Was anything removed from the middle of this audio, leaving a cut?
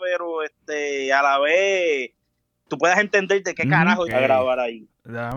yes; 2 cuts; at 2.7 s, 4.1 s

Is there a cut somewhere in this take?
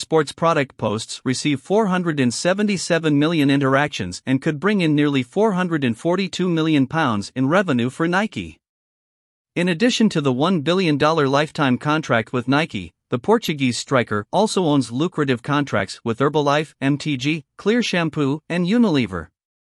yes; 2 cuts; at 16.7 s, 18.4 s

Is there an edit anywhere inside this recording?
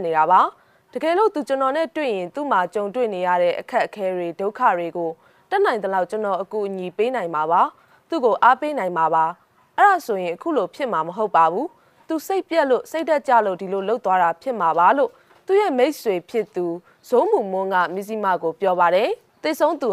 no; 0 cuts

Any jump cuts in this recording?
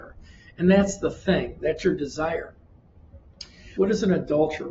yes; 2 cuts; at 1.6 s, 3.7 s

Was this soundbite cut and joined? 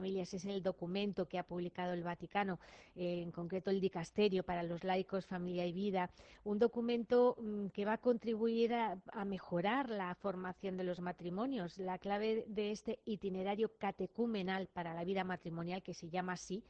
no; 0 cuts

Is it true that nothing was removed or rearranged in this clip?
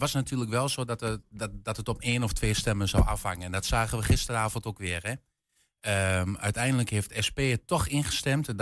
yes; 0 cuts

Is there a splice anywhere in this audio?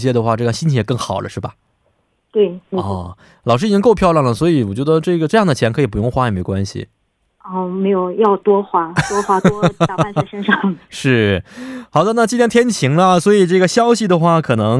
no; 0 cuts

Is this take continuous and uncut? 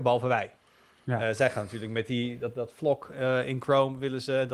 yes; 0 cuts

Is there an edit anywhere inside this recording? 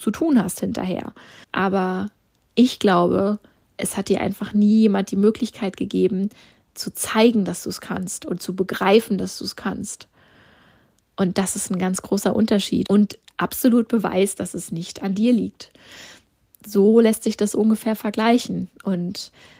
yes; 2 cuts; at 1.4 s, 12.9 s

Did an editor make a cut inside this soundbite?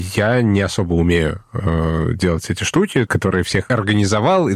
yes; 1 cut; at 3.1 s

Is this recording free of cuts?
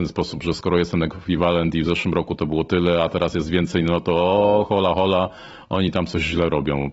yes; 0 cuts

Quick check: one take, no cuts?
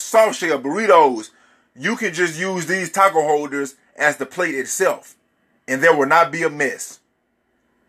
yes; 0 cuts

